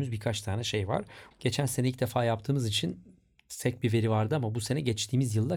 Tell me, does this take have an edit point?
yes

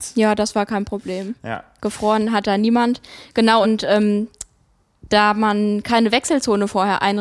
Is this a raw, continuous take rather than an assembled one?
yes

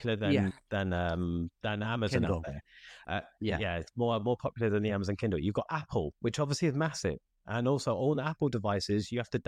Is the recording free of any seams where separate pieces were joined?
yes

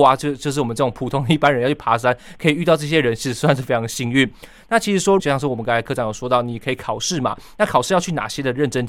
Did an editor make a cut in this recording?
yes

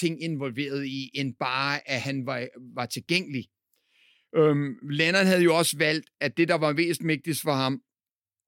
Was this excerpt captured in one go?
yes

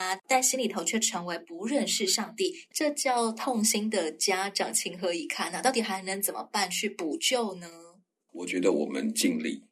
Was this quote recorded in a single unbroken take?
no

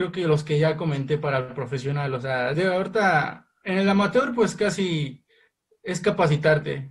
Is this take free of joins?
yes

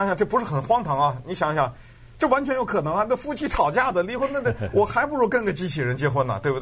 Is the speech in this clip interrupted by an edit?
no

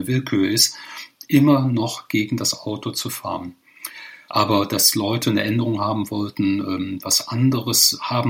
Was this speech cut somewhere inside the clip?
yes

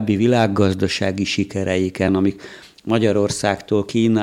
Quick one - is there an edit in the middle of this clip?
yes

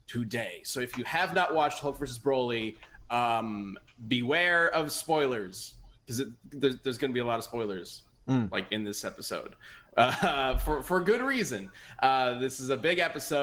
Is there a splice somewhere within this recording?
yes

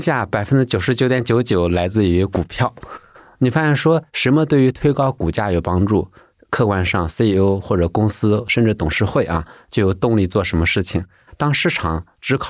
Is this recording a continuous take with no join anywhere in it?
yes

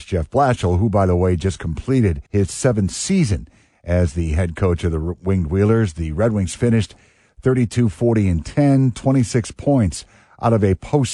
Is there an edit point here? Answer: yes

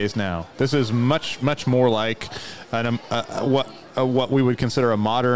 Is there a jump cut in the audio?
no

